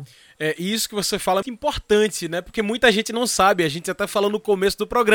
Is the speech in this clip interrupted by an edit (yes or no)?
yes